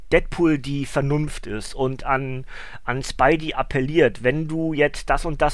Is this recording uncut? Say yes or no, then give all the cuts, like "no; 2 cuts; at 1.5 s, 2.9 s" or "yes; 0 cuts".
yes; 0 cuts